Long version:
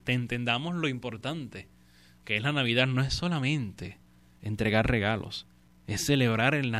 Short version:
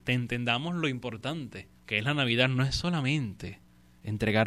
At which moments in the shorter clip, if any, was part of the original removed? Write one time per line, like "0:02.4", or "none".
0:01.8